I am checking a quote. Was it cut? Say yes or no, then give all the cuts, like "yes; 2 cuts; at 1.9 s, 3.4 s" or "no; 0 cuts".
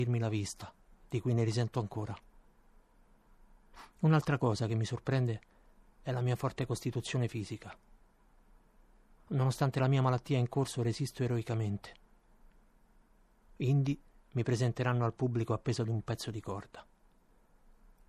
yes; 1 cut; at 13.5 s